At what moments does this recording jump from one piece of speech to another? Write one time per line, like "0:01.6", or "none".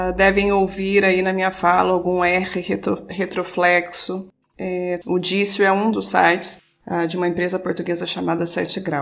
0:05.0